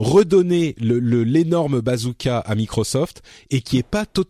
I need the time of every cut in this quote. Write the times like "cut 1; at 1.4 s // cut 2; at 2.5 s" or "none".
none